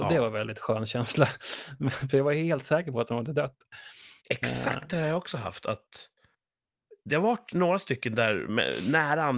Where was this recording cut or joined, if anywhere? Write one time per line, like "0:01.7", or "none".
none